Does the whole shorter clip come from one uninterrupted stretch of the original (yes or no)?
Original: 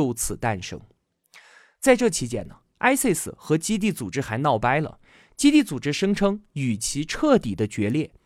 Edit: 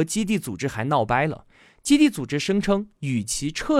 yes